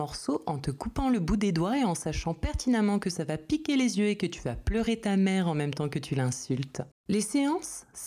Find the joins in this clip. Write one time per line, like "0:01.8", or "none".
0:06.9